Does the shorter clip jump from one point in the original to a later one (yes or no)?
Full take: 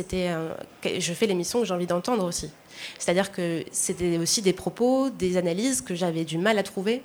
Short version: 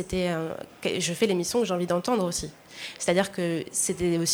no